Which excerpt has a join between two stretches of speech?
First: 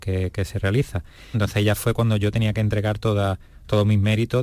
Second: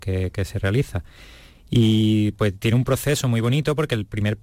first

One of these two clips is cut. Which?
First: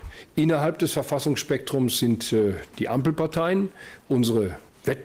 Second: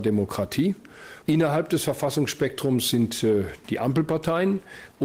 second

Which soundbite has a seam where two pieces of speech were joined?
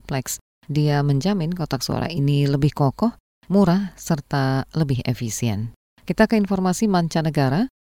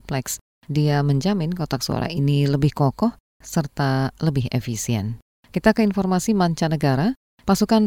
second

